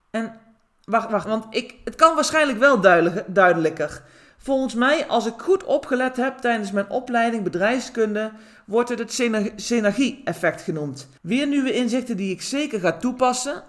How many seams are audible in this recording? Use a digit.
2